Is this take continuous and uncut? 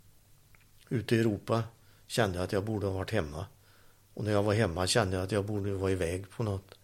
yes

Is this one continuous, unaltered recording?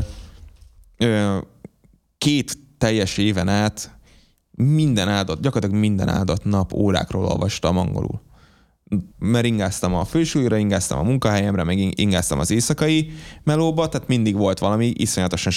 no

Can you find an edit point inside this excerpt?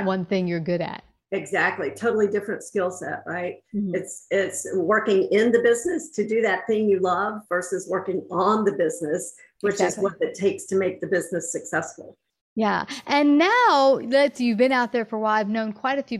no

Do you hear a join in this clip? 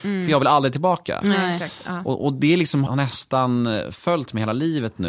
yes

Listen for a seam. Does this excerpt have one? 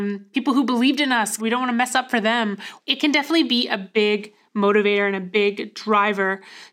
yes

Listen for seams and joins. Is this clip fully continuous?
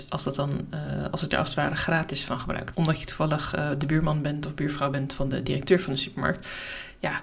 no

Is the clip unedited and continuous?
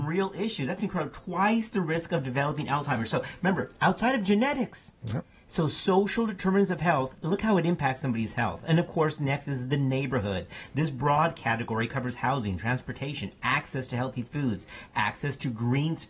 yes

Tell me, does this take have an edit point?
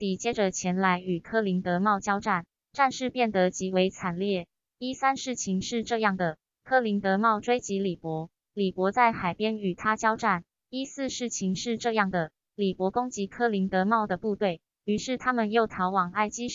yes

